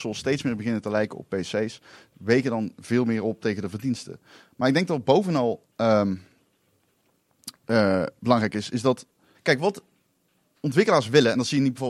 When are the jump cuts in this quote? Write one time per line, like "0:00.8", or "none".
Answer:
0:09.3